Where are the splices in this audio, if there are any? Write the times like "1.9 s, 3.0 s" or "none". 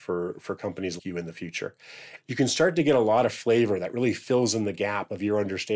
1.0 s, 2.2 s